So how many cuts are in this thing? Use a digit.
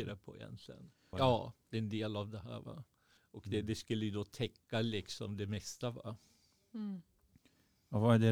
2